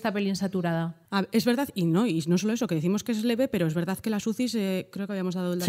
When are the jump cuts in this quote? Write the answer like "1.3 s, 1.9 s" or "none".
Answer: 1.1 s